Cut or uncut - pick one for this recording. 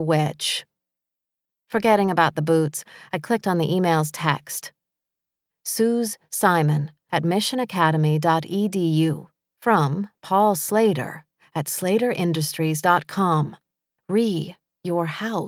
cut